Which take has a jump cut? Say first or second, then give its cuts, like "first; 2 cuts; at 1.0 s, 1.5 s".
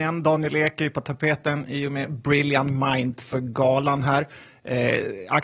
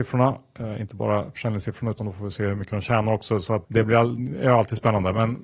second; 1 cut; at 3.6 s